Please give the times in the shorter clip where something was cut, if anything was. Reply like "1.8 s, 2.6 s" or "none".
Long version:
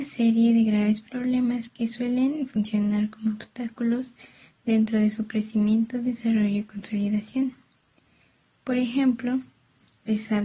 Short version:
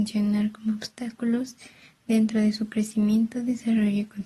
none